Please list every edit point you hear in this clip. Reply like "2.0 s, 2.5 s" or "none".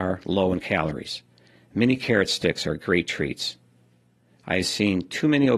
none